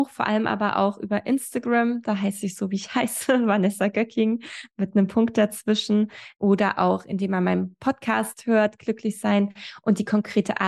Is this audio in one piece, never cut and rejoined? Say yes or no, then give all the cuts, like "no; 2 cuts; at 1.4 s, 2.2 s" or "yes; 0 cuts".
yes; 0 cuts